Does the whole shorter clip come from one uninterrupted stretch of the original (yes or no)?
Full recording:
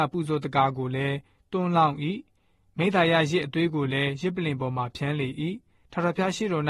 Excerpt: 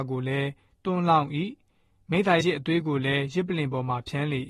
no